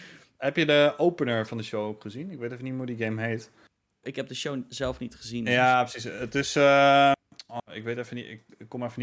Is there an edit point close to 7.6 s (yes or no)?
yes